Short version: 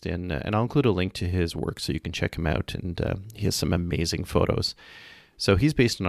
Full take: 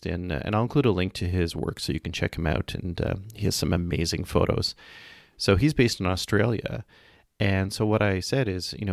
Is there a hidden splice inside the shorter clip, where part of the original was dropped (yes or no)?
no